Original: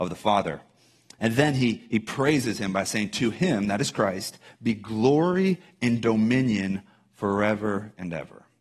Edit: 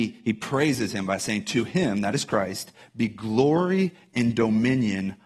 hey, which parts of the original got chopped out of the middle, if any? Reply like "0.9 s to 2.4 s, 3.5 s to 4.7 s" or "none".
none